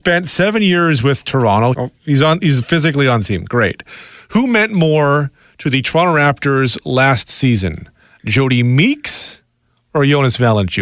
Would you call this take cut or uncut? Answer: cut